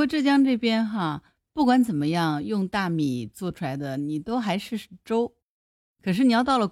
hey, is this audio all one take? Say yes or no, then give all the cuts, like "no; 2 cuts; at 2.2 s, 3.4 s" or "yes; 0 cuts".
yes; 0 cuts